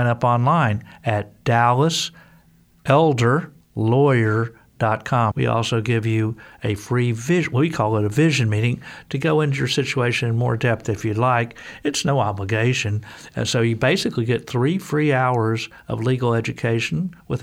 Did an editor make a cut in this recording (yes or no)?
yes